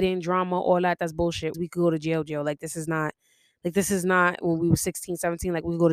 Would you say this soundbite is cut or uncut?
cut